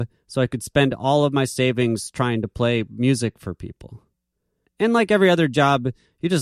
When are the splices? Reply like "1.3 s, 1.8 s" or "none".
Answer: 4.6 s